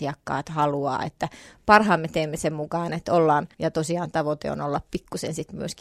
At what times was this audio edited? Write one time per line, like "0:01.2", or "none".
0:03.5